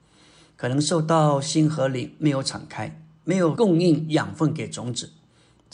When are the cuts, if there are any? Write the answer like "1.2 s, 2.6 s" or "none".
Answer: 3.6 s